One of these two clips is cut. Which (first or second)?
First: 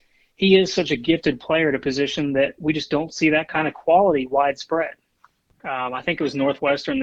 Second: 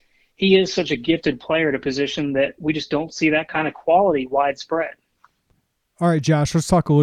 first